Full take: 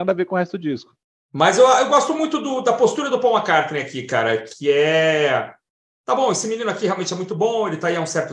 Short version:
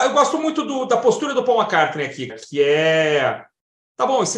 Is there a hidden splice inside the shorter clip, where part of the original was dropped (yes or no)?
yes